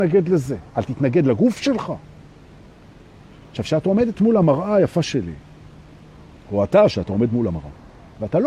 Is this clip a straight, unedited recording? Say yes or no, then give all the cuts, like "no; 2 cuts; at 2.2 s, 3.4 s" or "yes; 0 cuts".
yes; 0 cuts